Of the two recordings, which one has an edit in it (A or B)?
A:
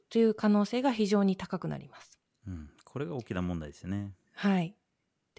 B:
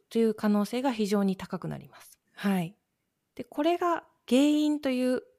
B